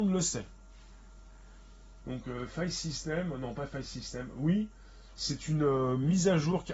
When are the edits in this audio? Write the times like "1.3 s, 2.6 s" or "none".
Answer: 2.0 s